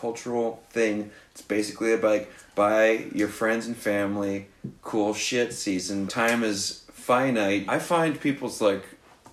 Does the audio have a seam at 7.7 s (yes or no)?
yes